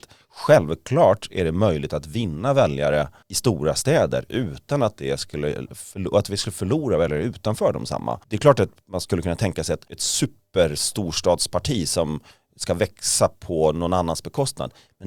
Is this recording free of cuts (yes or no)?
no